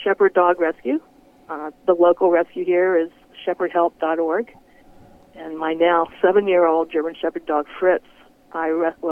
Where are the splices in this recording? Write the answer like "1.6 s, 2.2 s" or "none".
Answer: none